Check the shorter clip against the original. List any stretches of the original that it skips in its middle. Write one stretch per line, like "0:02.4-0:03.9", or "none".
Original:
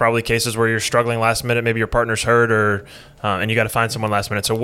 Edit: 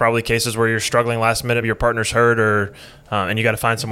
0:01.6-0:01.7